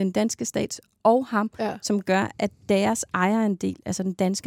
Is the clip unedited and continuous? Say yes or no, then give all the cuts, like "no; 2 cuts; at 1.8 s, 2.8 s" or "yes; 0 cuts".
yes; 0 cuts